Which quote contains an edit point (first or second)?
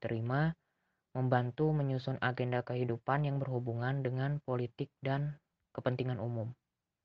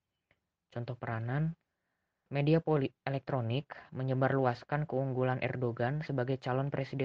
second